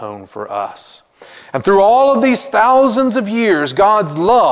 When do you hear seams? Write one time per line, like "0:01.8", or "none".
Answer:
none